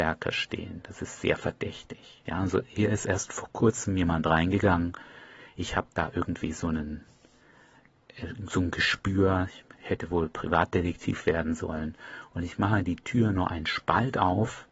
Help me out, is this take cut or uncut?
cut